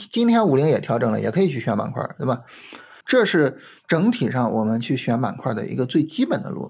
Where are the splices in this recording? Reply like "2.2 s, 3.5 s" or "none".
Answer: 3.0 s